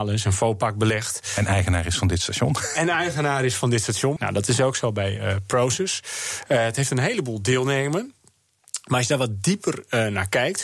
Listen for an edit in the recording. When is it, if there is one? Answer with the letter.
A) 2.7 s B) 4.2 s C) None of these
B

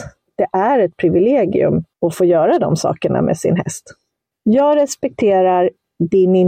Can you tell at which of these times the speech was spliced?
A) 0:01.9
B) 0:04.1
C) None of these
A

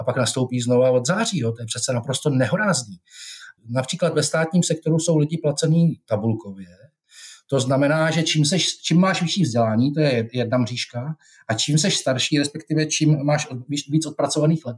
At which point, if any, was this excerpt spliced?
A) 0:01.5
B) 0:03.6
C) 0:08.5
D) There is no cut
B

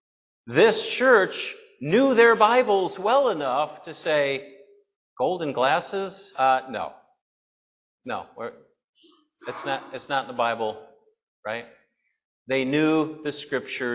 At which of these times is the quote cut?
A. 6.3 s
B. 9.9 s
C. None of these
A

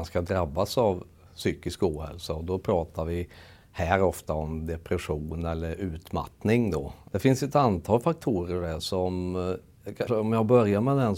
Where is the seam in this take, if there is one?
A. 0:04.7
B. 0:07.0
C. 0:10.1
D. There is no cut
C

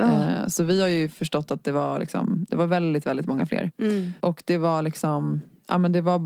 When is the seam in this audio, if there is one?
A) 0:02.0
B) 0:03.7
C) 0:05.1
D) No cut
B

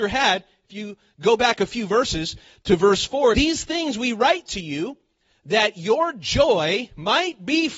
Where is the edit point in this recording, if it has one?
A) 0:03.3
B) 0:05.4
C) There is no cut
A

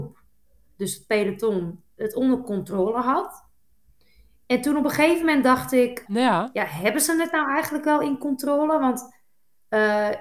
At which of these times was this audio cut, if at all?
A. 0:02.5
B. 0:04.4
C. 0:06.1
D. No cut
C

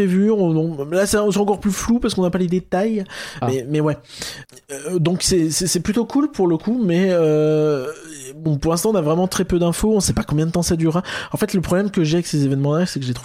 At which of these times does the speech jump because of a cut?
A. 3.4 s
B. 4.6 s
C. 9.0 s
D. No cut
A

